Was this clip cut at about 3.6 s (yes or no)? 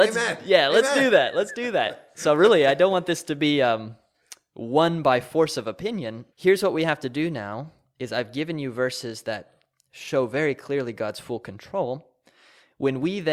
no